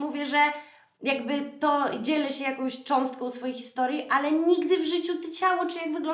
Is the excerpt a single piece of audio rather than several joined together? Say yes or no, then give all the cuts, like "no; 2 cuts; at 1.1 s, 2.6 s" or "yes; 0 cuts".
yes; 0 cuts